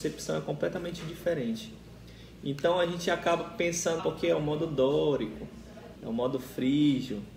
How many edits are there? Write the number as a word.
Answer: two